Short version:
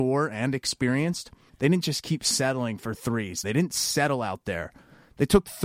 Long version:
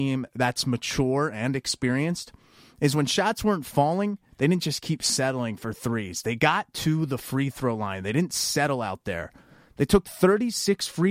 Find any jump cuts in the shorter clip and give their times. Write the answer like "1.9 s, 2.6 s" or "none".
1.5 s, 3.4 s